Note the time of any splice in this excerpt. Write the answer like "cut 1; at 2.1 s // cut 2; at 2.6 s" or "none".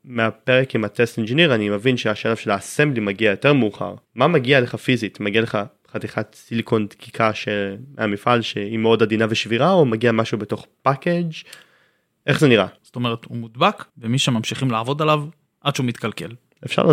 cut 1; at 4.0 s // cut 2; at 12.8 s // cut 3; at 13.9 s